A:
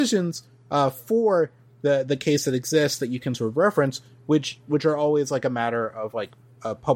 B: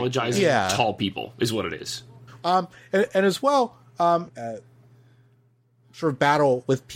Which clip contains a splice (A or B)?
B